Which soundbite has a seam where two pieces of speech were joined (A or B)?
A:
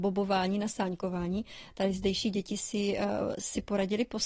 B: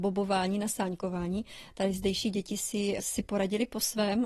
B